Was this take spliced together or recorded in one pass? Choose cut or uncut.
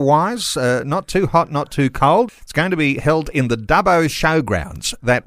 cut